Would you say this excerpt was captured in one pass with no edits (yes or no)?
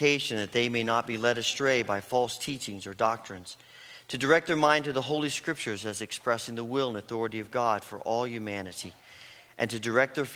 yes